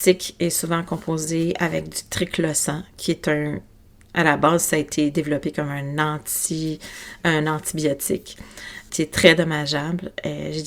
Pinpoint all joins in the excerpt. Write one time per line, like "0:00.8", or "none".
0:08.9